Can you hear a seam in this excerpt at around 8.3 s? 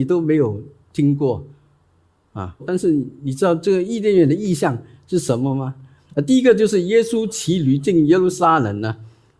no; 2 cuts; at 2.6 s, 6.0 s

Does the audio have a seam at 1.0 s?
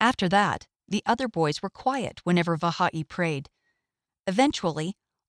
no; 1 cut; at 4.1 s

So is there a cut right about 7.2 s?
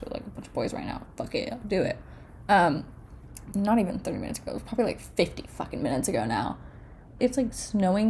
yes; 2 cuts; at 3.5 s, 7.2 s

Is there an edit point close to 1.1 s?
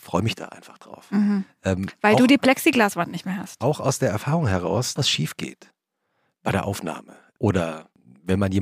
no; 1 cut; at 5.0 s

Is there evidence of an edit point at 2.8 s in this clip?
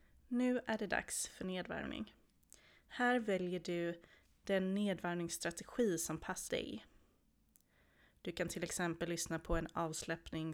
no; 1 cut; at 6.5 s

